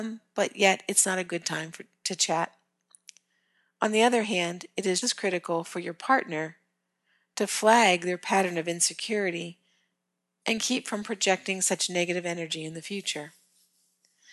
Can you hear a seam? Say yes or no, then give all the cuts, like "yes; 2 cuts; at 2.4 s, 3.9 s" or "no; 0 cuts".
yes; 1 cut; at 5.0 s